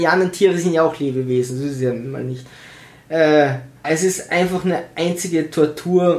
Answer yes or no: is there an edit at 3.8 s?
yes